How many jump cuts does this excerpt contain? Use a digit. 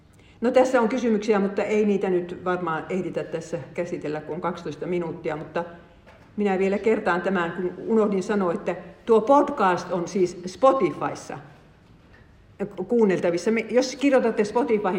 0